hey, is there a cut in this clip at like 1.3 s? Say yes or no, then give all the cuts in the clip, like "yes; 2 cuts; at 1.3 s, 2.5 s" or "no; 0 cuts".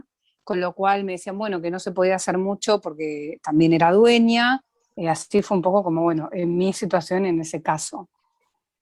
no; 1 cut; at 4.9 s